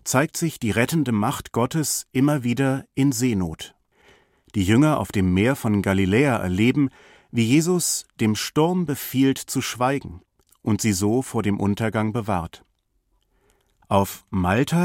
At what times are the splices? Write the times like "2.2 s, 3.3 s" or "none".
13.8 s